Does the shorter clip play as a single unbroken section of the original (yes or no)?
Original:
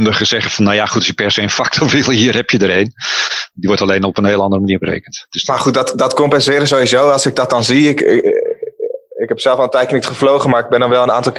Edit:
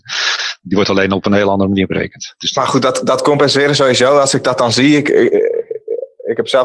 yes